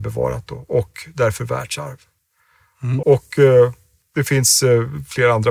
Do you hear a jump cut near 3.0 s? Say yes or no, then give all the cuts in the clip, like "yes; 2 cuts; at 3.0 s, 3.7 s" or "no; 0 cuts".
yes; 1 cut; at 3.0 s